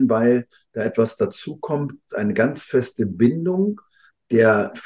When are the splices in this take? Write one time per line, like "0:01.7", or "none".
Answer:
0:02.1